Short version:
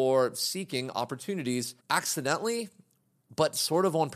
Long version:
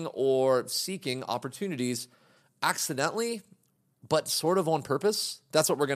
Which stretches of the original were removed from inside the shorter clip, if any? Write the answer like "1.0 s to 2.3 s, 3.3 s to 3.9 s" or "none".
2.1 s to 2.5 s